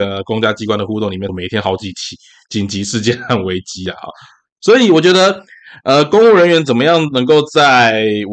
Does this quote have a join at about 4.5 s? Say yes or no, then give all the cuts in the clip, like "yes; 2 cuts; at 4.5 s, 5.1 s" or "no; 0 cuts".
no; 1 cut; at 1.3 s